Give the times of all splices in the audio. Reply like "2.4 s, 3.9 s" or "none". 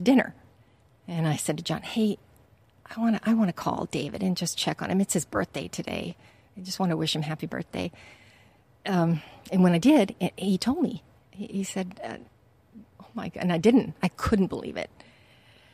11.5 s, 12.9 s